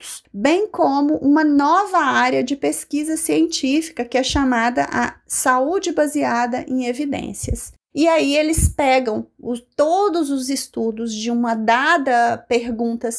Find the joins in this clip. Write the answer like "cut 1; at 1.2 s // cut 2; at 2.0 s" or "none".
cut 1; at 7.9 s